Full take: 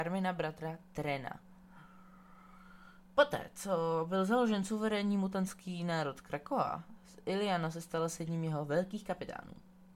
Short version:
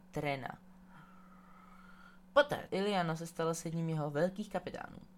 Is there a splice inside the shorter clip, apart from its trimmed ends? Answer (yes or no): yes